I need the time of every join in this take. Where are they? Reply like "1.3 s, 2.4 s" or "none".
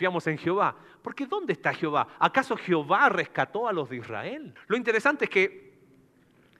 4.6 s